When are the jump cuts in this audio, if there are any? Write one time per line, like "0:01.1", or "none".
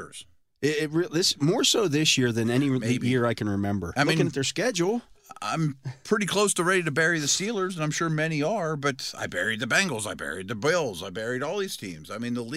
0:03.9